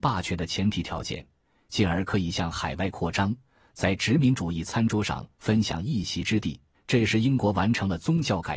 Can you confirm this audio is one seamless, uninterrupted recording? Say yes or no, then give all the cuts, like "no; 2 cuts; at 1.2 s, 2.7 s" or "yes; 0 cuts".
no; 1 cut; at 6.7 s